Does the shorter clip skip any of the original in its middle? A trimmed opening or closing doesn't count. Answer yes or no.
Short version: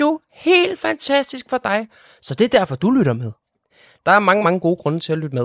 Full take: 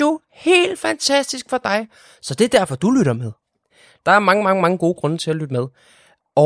yes